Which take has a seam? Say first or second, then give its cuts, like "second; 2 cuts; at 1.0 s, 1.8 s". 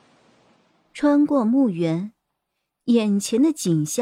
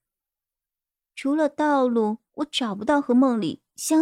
second; 1 cut; at 2.3 s